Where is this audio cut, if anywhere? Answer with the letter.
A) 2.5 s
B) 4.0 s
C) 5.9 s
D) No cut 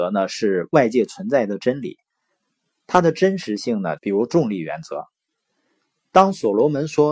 B